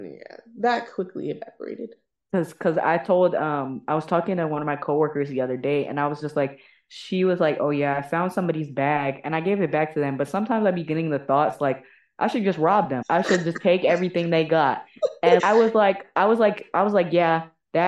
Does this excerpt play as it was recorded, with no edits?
no; 2 cuts; at 13.0 s, 15.4 s

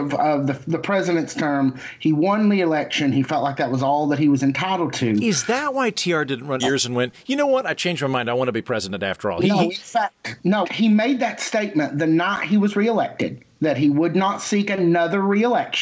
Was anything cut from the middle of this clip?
yes; 2 cuts; at 6.6 s, 10.6 s

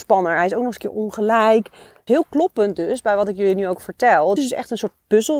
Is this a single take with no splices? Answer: no; 2 cuts; at 2.1 s, 4.4 s

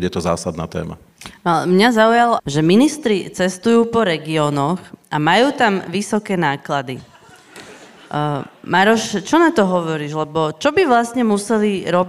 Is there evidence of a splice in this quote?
yes; 1 cut; at 2.4 s

